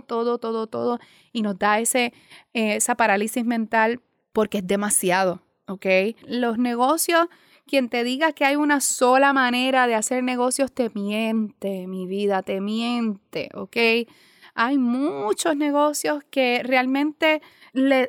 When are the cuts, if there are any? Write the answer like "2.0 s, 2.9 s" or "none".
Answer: 6.2 s